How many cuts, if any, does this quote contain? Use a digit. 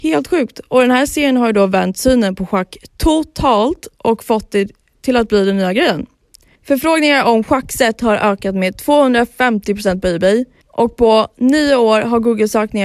0